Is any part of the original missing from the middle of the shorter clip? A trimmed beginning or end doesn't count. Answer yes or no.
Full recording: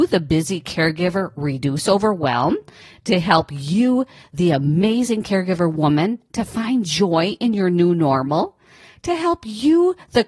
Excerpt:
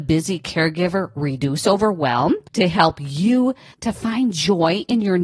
yes